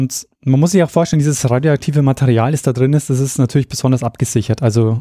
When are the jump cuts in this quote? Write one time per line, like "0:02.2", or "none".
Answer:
none